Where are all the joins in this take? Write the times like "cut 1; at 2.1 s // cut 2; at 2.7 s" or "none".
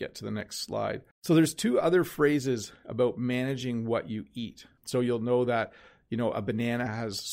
cut 1; at 1.1 s // cut 2; at 4.8 s